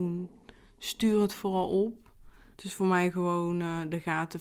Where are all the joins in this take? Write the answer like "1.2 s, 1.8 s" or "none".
2.5 s